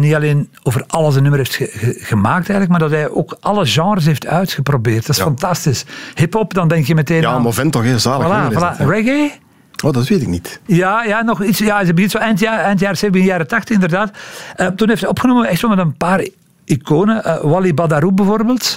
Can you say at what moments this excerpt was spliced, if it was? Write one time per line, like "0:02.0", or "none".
0:10.7